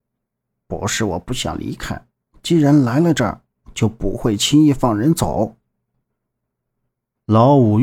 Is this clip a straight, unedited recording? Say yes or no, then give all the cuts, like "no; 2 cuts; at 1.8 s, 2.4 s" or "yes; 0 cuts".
no; 2 cuts; at 2.3 s, 5.9 s